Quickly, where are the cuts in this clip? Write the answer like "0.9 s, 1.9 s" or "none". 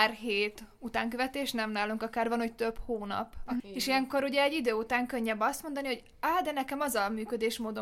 3.6 s